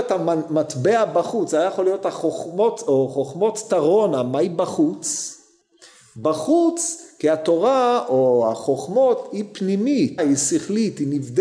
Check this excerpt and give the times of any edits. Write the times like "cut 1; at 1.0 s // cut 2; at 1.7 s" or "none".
cut 1; at 10.2 s